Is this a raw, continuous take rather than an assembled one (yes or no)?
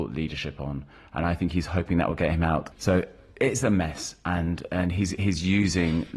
no